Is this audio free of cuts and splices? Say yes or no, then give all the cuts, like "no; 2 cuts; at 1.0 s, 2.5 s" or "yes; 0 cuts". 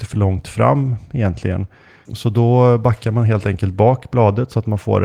no; 1 cut; at 2.1 s